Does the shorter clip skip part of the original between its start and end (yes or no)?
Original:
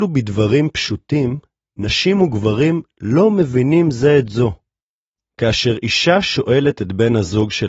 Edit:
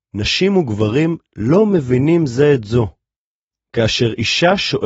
no